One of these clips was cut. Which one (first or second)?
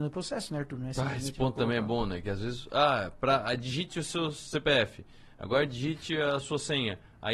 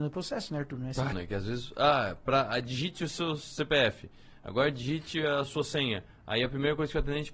second